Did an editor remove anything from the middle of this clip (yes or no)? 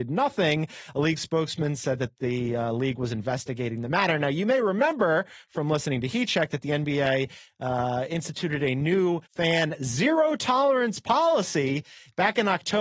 yes